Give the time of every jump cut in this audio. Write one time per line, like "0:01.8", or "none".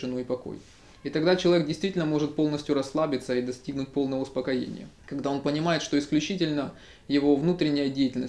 0:05.0